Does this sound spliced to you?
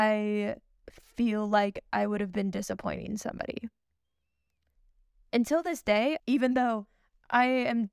yes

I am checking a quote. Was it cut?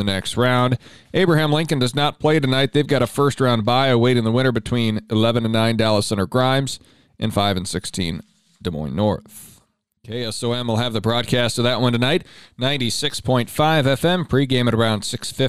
yes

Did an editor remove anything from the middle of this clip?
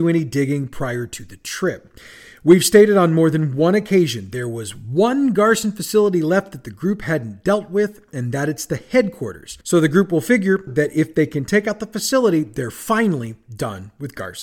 yes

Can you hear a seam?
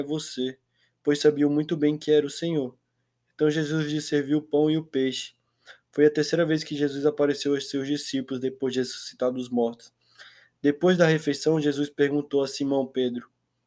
no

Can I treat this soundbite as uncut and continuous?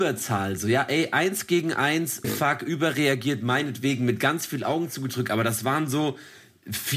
no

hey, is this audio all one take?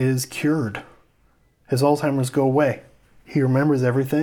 yes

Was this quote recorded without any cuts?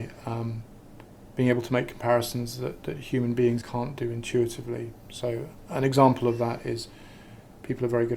no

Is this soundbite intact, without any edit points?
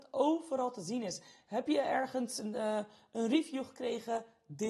yes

